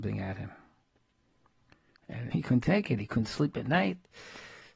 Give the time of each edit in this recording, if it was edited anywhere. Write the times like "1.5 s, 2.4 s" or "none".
2.3 s